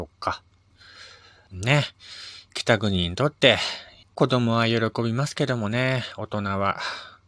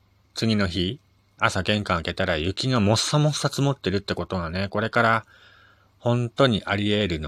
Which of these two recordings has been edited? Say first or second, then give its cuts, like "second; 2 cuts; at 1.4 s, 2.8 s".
first; 2 cuts; at 1.5 s, 4.0 s